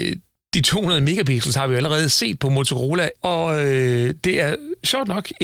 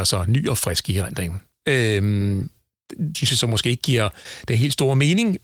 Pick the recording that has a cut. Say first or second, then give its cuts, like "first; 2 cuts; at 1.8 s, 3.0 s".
second; 2 cuts; at 1.6 s, 3.1 s